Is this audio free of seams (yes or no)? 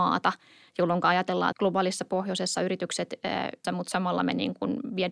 no